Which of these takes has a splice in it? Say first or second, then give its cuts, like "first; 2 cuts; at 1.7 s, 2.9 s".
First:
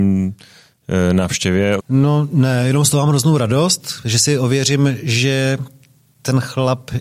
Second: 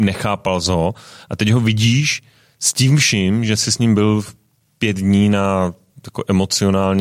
first; 1 cut; at 1.8 s